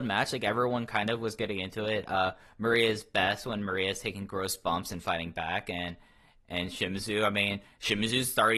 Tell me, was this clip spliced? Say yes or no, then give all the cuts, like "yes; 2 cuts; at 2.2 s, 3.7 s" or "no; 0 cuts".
no; 0 cuts